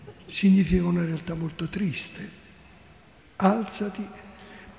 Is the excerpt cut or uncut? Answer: cut